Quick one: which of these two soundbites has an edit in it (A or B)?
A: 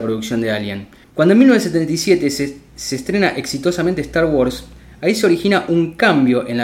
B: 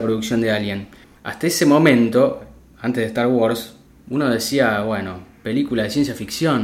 A